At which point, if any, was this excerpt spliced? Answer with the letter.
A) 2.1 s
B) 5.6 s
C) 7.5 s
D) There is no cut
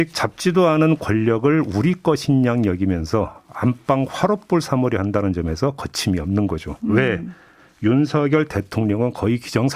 D